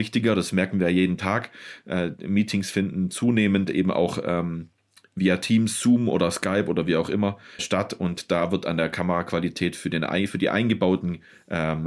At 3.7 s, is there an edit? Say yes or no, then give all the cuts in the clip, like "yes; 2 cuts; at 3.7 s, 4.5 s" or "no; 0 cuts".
no; 1 cut; at 7.6 s